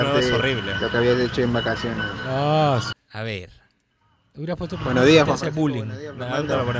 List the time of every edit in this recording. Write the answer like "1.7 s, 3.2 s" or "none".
2.9 s